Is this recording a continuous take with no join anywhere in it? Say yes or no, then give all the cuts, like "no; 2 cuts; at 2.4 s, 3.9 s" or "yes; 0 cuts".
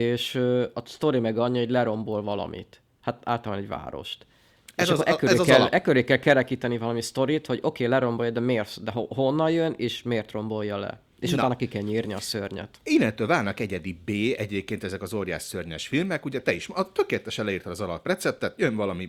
yes; 0 cuts